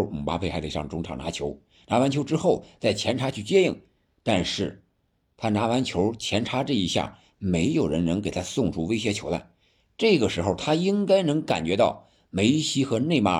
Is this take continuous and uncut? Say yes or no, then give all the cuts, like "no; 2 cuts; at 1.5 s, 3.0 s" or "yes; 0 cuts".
yes; 0 cuts